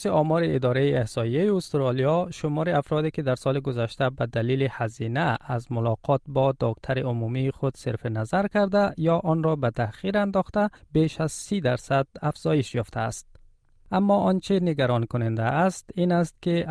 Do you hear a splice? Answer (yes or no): no